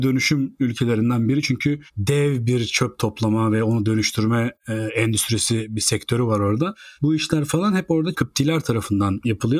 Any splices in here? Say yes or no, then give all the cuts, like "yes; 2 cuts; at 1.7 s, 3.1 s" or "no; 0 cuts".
no; 0 cuts